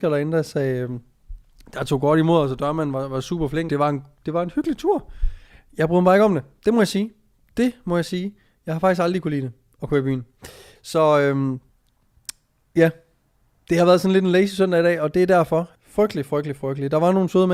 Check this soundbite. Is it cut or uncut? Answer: cut